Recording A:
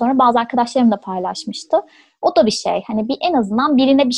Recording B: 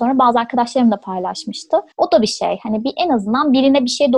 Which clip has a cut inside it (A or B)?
B